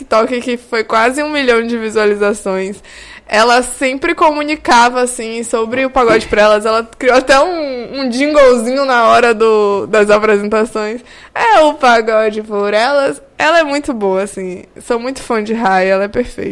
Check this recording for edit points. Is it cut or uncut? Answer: uncut